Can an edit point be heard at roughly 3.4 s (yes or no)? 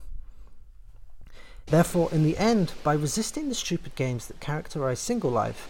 no